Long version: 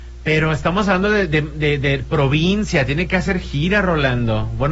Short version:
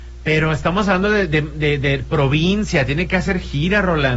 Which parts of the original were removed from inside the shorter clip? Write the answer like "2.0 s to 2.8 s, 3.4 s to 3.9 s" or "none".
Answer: none